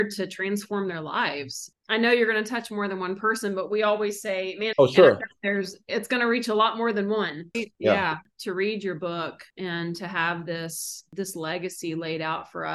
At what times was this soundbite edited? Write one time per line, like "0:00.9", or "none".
0:04.7
0:07.5